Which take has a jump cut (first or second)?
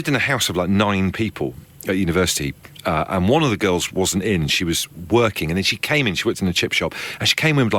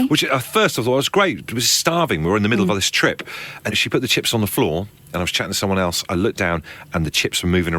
second